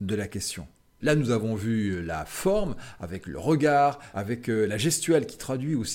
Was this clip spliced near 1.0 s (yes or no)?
yes